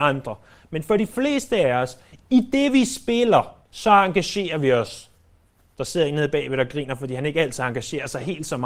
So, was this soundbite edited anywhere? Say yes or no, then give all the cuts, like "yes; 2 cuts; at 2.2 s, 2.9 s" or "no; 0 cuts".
yes; 1 cut; at 3.6 s